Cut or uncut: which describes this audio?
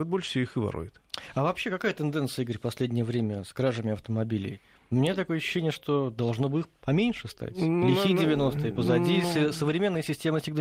uncut